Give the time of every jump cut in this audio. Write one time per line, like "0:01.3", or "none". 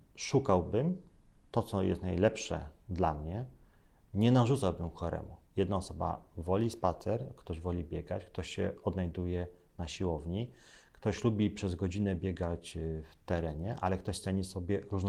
0:05.4

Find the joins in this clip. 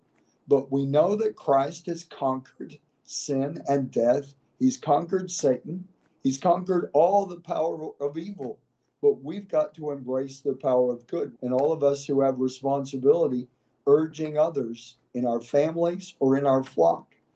0:11.3

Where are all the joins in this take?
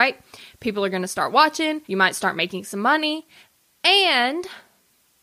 0:01.8

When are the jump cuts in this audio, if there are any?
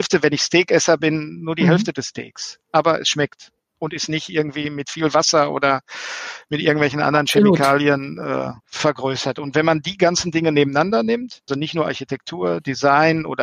0:08.6
0:11.5

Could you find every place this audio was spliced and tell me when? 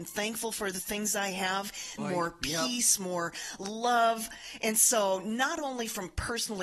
0:02.0

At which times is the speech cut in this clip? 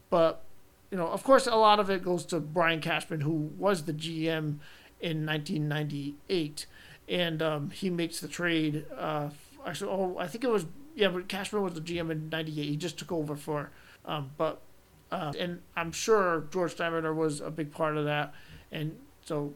0:14.0
0:15.3

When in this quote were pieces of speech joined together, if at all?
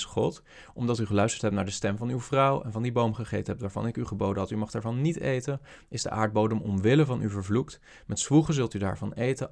none

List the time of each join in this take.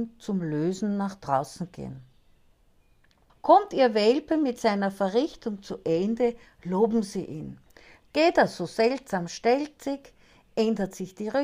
0:03.3
0:08.0

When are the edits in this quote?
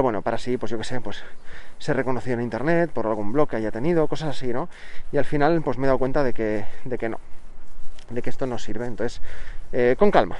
none

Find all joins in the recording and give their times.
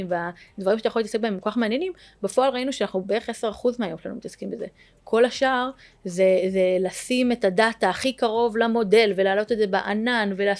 none

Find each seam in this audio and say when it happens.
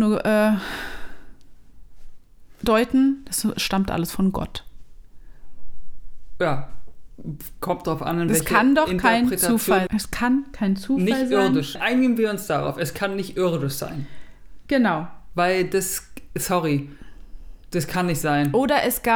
0:09.9
0:11.8

